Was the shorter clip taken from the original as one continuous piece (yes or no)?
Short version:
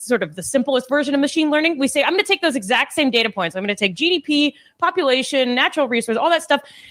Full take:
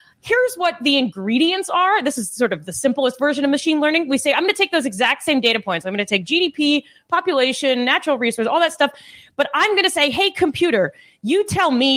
yes